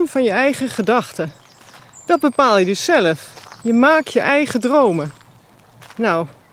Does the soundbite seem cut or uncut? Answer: uncut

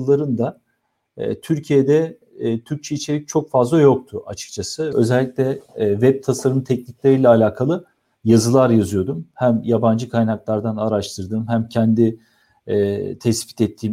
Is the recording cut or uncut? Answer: cut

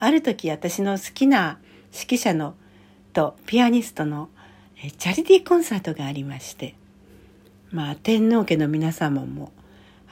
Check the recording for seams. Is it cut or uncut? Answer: uncut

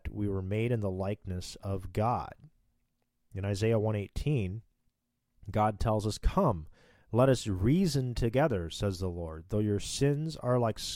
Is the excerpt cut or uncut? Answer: uncut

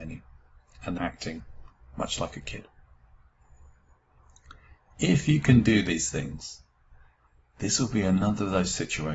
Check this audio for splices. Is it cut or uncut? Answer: cut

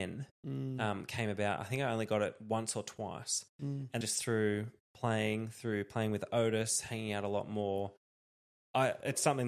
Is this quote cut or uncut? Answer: cut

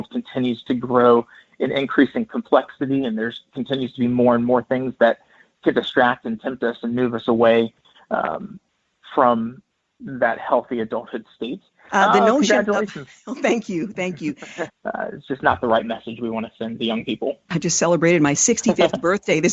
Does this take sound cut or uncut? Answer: cut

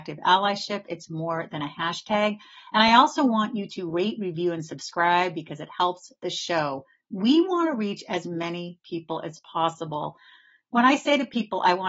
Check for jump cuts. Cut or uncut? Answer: uncut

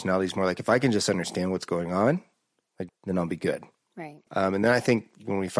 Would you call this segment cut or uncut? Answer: cut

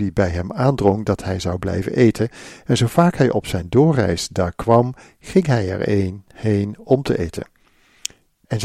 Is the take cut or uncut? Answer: uncut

